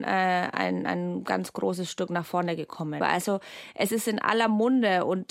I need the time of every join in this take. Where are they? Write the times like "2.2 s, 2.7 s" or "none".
3.0 s